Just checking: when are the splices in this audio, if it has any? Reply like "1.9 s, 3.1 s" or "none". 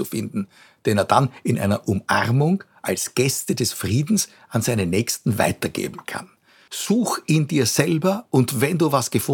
6.7 s